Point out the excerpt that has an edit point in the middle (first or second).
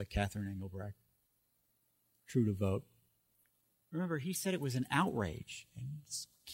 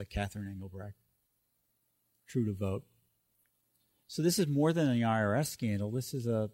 first